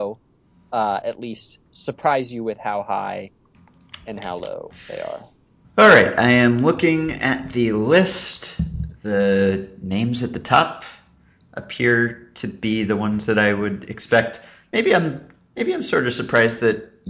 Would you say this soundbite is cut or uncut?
uncut